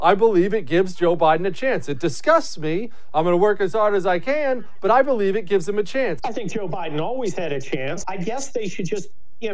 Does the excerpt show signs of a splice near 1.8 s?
no; 2 cuts; at 6.2 s, 8.0 s

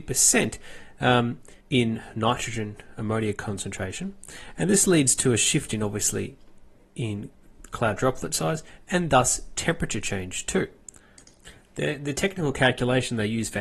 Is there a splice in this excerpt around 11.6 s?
no; 1 cut; at 1.6 s

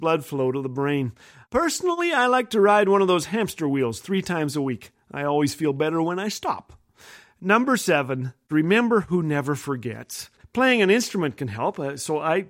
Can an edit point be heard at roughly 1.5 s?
no; 1 cut; at 10.4 s

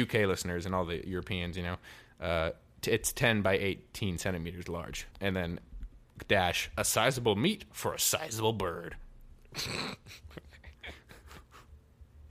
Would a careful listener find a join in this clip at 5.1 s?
yes; 1 cut; at 5.1 s

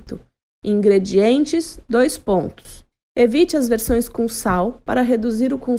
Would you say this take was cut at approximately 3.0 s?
yes; 1 cut; at 3.0 s

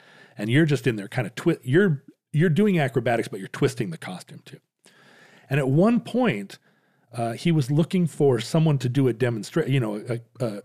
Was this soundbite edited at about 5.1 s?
no; 0 cuts

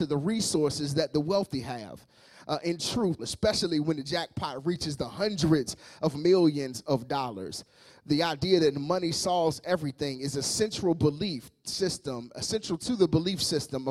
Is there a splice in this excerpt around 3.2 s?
yes; 1 cut; at 3.2 s

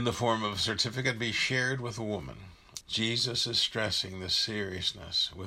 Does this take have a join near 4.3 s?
no; 1 cut; at 2.8 s

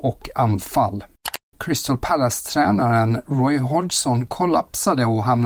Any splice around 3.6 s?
no; 1 cut; at 1.5 s

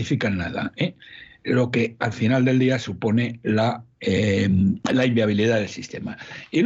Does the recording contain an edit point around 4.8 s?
yes; 1 cut; at 4.8 s

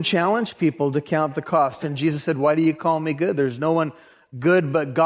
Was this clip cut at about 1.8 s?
yes; 1 cut; at 1.8 s

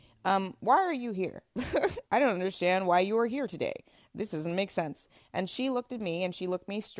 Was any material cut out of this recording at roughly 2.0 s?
yes; 1 cut; at 2.0 s

